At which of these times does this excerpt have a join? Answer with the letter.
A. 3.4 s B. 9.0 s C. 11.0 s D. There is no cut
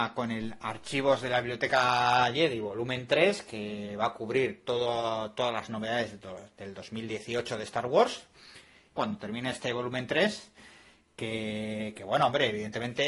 B